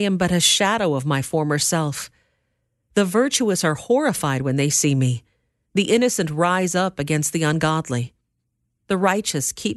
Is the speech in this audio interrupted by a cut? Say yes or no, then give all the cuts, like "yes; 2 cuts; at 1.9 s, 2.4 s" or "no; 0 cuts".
no; 0 cuts